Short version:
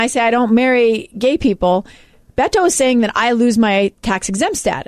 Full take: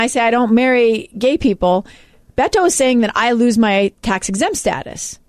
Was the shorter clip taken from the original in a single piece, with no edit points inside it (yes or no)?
yes